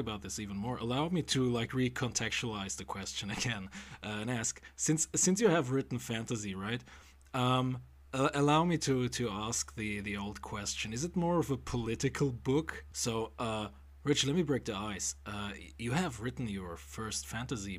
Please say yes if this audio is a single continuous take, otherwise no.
no